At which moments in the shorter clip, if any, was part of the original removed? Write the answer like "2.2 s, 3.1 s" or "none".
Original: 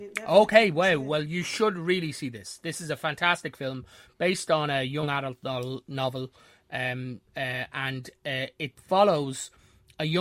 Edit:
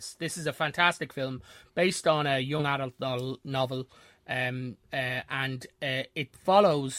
none

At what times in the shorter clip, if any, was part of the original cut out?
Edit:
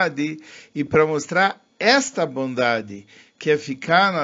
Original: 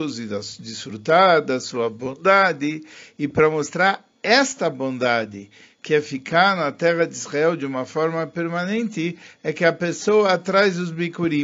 none

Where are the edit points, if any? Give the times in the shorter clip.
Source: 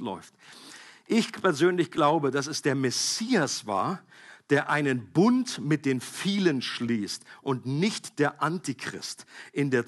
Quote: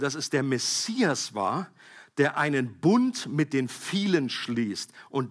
none

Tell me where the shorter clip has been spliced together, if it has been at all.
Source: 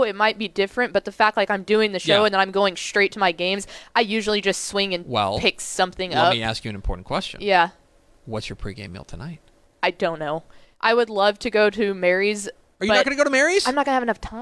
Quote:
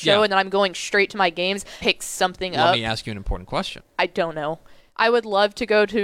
1.8 s, 3.8 s

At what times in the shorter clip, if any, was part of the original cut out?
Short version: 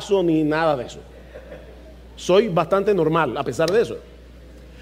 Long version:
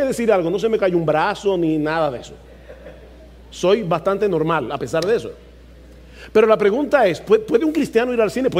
none

